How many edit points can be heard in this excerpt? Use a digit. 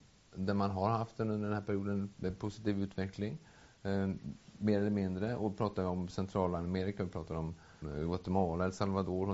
1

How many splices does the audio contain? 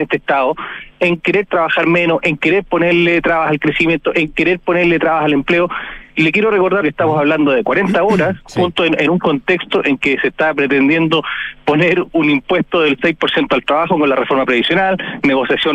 1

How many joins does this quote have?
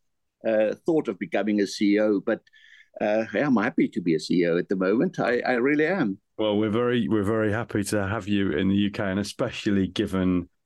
0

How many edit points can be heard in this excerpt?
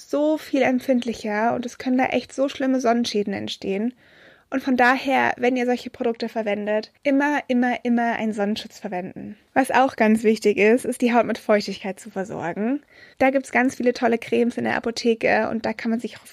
1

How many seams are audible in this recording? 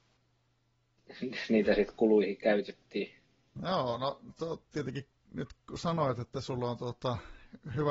1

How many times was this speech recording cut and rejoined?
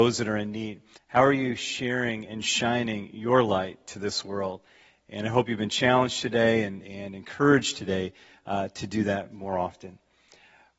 1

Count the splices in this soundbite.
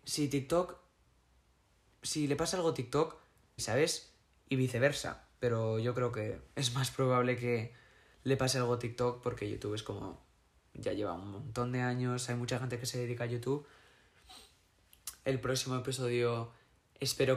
2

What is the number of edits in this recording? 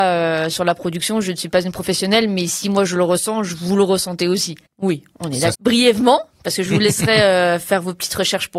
1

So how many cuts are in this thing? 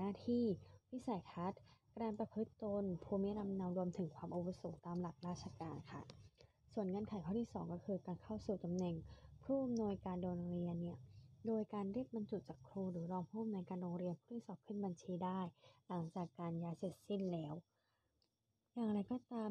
0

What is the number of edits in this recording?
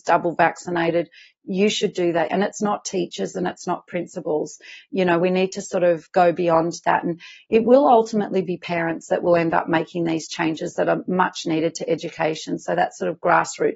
1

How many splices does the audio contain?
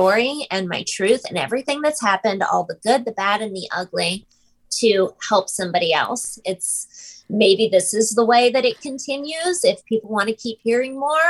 1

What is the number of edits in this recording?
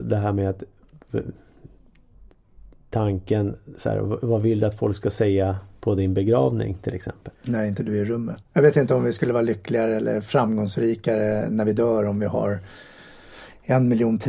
2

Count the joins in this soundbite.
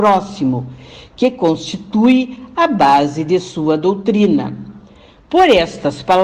1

